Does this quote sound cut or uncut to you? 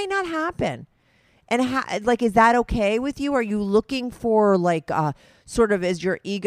uncut